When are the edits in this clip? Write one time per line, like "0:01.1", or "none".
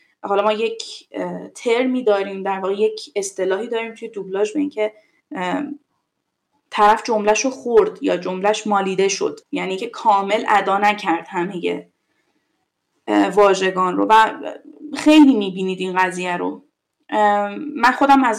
0:09.4

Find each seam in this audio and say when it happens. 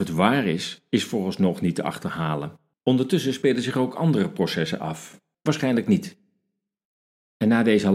0:02.7
0:05.3

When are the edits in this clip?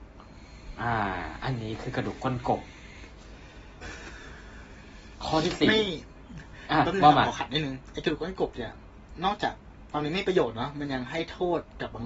0:03.8

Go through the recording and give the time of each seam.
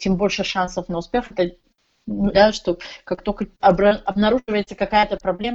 0:02.3
0:03.6

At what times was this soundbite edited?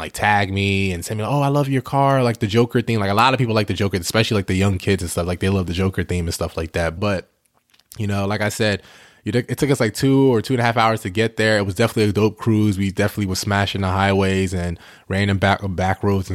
0:07.0

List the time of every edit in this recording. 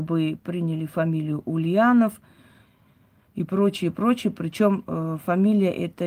none

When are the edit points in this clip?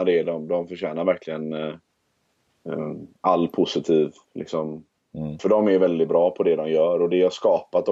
0:03.1
0:05.4

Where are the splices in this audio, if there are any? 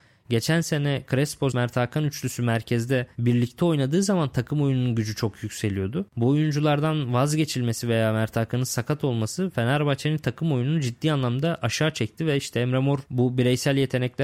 0:01.5
0:06.1

